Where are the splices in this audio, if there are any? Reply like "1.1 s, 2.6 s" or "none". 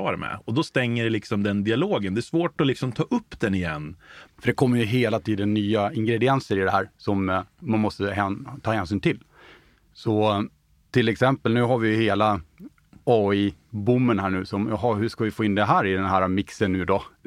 4.3 s